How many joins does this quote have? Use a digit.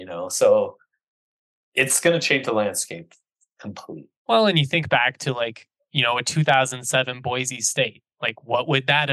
1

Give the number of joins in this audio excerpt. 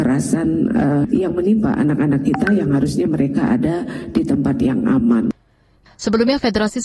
1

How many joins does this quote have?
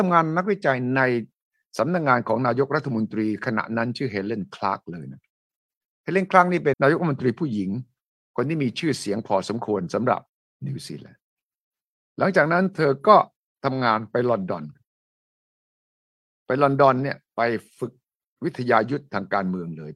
1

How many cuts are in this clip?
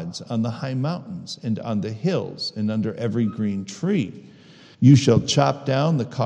1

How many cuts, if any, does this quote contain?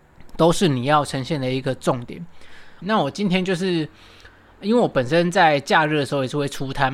1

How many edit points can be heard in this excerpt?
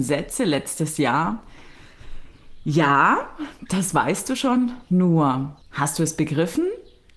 1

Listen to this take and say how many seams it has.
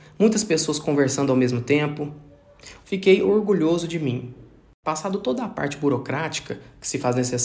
1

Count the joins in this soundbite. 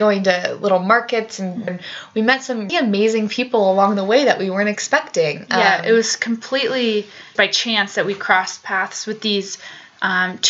3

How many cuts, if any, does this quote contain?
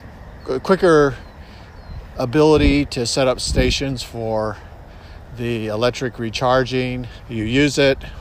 1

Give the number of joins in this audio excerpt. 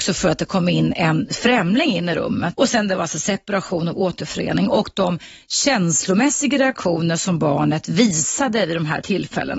1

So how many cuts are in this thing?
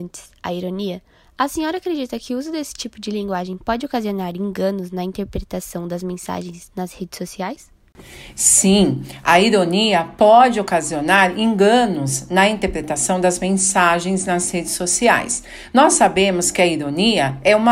0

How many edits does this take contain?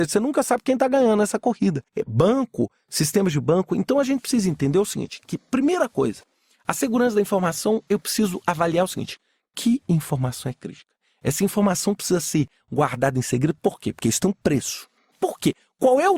1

